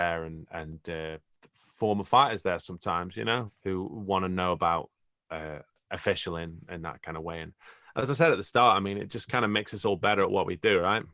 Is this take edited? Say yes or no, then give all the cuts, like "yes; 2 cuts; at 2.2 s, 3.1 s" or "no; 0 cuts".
yes; 1 cut; at 3.5 s